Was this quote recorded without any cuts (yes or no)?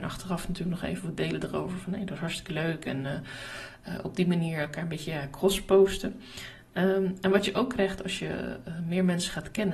yes